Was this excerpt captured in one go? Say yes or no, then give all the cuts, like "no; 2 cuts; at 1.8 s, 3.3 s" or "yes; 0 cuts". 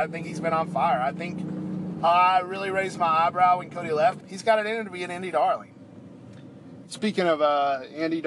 no; 2 cuts; at 4.2 s, 6.8 s